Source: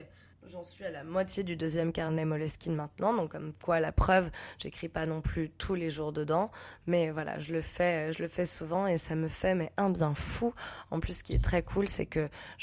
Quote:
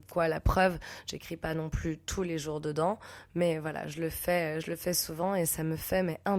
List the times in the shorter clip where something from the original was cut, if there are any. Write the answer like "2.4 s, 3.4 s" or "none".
none